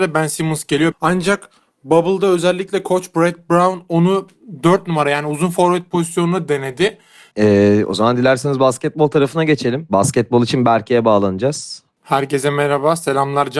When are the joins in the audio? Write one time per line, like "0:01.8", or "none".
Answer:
0:00.9
0:07.3
0:12.0

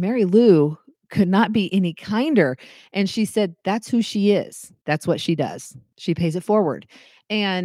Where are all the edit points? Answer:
none

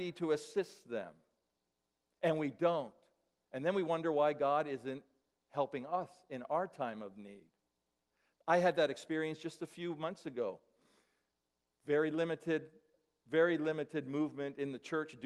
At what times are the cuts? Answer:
none

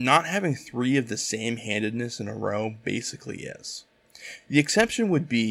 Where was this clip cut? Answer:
none

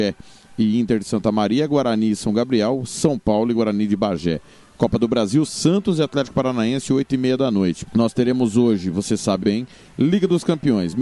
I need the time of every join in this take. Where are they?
0:07.9
0:09.4

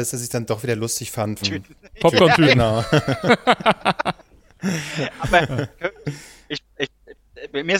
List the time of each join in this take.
0:01.4

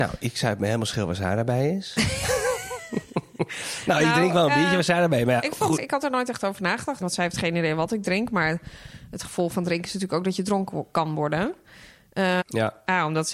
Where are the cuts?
0:05.8
0:07.0
0:12.4

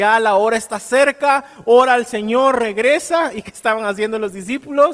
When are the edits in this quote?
none

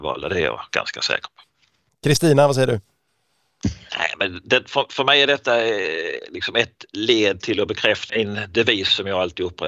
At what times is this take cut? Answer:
0:03.9
0:08.1

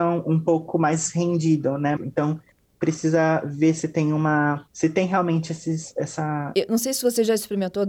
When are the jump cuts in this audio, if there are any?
0:02.0
0:06.5

